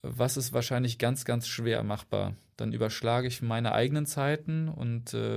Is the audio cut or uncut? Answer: uncut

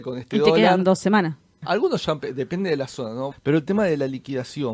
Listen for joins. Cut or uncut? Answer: cut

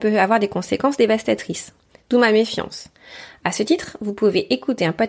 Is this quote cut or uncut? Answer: uncut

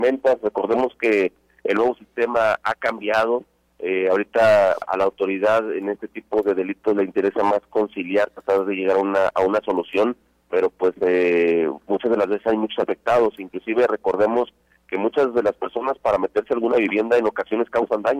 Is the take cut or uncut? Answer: cut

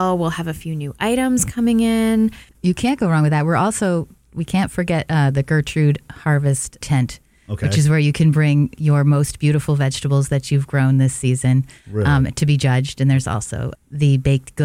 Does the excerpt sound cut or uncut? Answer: cut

